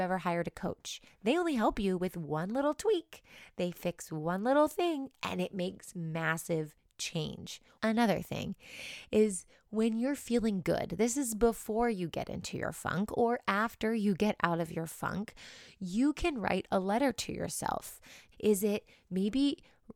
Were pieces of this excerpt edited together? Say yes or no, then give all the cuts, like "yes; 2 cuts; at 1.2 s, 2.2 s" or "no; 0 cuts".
yes; 2 cuts; at 7.7 s, 18.3 s